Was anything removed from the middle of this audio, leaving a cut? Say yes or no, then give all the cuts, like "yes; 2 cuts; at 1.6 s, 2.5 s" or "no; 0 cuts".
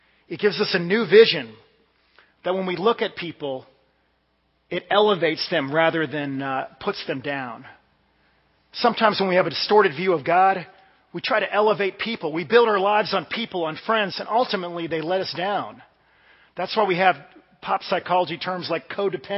yes; 1 cut; at 14.1 s